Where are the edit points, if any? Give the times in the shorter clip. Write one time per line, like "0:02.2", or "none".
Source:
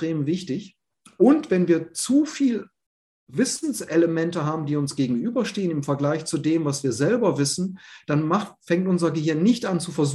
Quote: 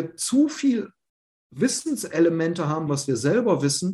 0:02.9